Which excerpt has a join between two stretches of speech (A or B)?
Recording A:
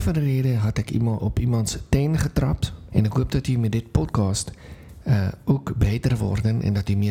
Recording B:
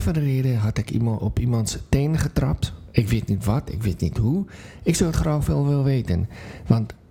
A